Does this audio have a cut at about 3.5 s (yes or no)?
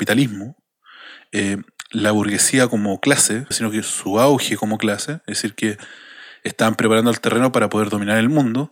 yes